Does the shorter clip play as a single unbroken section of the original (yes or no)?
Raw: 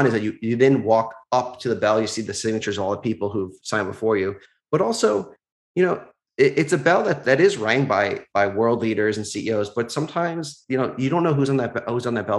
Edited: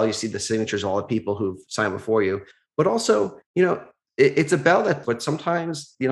no